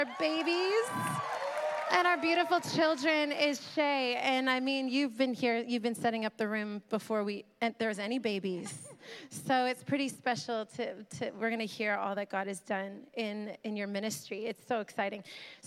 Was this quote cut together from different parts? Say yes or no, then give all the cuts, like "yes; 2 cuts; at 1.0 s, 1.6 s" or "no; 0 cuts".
no; 0 cuts